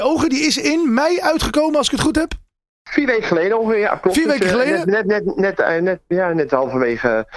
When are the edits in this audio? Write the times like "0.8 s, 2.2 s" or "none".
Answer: none

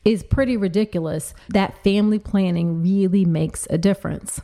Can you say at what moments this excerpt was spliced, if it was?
1.5 s

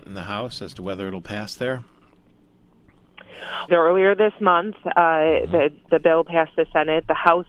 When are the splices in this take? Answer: 3.7 s, 5.9 s

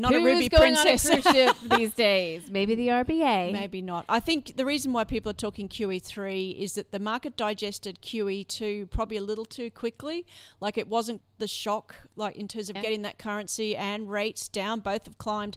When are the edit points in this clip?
11.2 s, 12.8 s

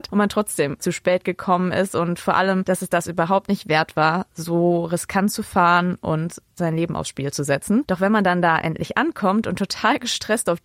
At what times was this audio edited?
7.8 s

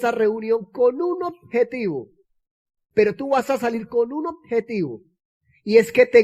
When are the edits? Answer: 2.9 s

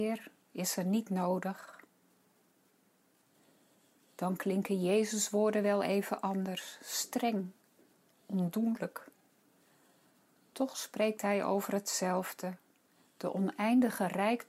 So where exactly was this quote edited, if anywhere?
none

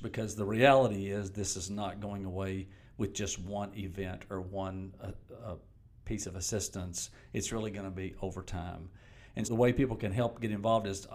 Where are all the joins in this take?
9.4 s

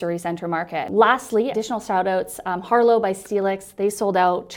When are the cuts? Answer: 1.5 s

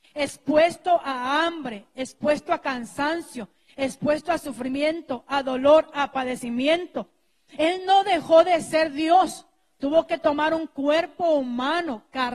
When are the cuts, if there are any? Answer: 7.6 s

